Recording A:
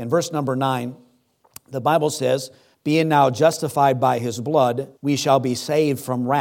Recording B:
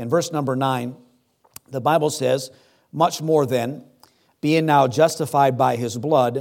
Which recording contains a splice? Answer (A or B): A